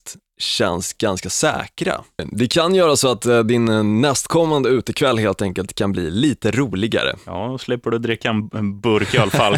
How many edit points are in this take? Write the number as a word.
one